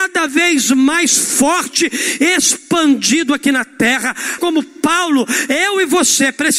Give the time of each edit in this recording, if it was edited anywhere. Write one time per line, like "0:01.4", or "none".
0:04.4